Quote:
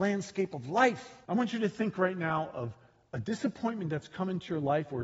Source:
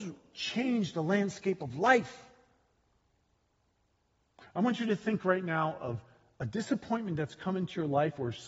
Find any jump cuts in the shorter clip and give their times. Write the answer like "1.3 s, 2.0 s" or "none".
1.2 s